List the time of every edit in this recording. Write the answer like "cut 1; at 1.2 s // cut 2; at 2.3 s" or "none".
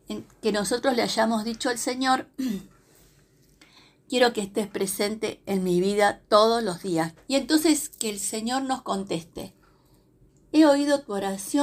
cut 1; at 7.2 s